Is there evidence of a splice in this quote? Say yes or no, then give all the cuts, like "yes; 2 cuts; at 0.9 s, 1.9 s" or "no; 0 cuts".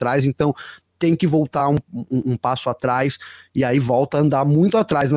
no; 0 cuts